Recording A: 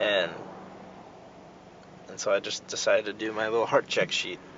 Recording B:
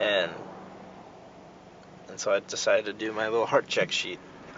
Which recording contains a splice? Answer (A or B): B